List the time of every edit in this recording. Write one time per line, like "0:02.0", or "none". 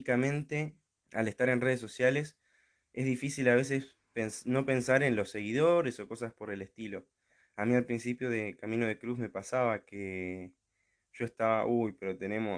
0:01.0